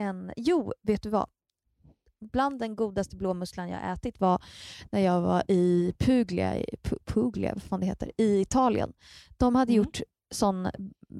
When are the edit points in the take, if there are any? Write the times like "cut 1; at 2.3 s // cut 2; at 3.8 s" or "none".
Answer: none